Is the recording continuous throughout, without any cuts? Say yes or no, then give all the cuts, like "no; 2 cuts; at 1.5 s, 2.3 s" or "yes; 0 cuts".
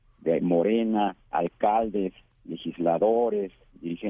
yes; 0 cuts